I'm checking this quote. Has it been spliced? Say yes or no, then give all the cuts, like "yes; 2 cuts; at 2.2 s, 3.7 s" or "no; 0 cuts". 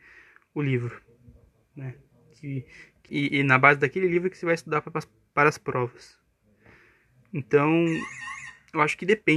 yes; 1 cut; at 3.1 s